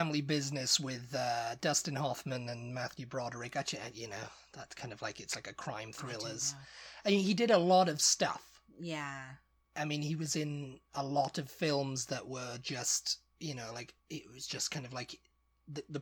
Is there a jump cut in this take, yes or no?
no